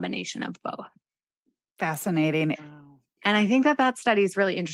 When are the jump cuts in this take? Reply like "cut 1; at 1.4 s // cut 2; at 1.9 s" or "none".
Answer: cut 1; at 2.5 s